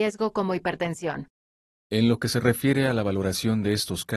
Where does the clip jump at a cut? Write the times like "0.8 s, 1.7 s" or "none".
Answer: 1.7 s